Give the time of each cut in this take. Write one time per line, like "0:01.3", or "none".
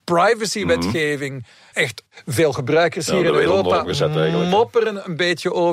0:01.7

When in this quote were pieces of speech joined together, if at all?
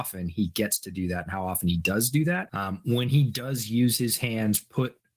0:02.5

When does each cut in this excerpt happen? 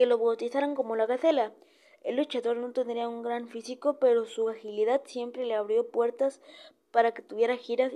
none

